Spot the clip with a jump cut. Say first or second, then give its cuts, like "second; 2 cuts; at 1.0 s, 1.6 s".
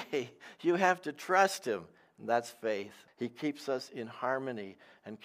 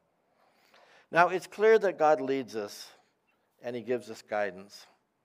first; 1 cut; at 3.1 s